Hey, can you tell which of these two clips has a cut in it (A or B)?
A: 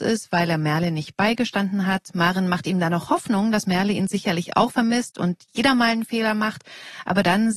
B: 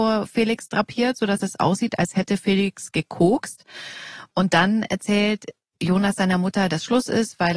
B